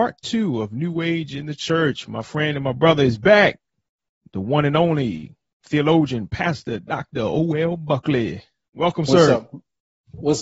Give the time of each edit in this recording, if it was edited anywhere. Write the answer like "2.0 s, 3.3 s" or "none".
none